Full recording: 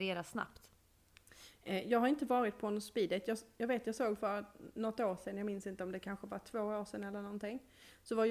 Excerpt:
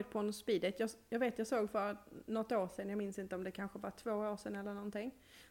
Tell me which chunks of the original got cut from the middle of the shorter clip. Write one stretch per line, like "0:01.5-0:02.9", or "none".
none